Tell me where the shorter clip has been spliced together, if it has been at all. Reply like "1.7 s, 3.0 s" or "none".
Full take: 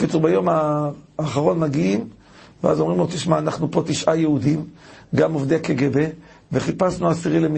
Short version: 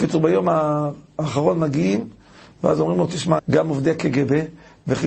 3.4 s